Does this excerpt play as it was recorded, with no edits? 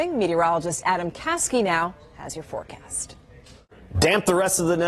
yes; 0 cuts

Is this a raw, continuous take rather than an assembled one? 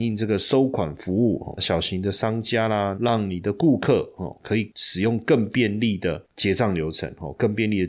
no; 2 cuts; at 1.6 s, 3.0 s

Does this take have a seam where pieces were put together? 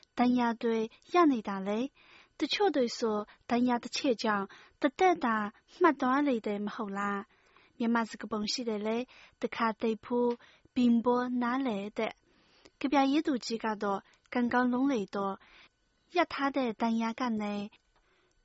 no; 0 cuts

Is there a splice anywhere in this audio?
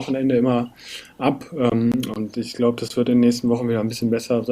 yes; 1 cut; at 2.3 s

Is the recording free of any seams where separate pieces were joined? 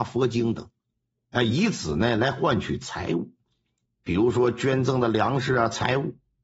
no; 1 cut; at 3.9 s

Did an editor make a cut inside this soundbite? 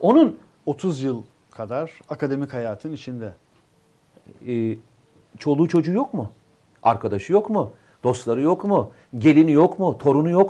no; 0 cuts

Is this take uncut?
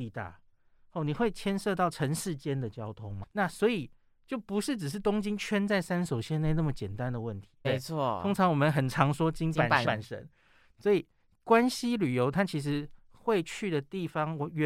no; 3 cuts; at 3.2 s, 7.6 s, 9.8 s

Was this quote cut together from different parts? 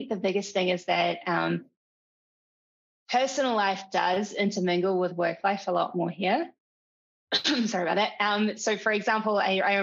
no; 0 cuts

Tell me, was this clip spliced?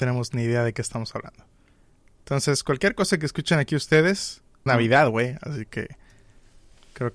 yes; 1 cut; at 4.7 s

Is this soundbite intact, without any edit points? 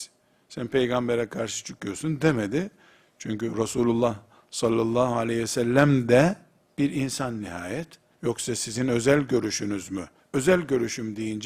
no; 2 cuts; at 8.1 s, 10.2 s

